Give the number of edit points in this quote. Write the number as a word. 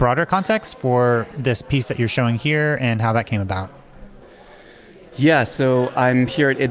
zero